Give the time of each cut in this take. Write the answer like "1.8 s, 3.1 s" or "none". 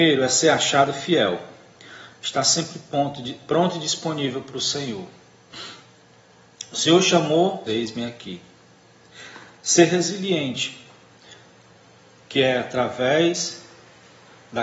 7.7 s